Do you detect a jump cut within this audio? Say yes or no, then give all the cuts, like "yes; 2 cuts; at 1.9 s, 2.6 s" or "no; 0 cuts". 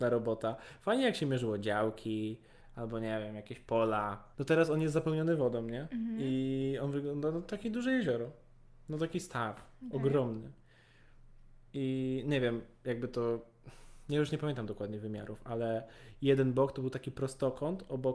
yes; 1 cut; at 4.3 s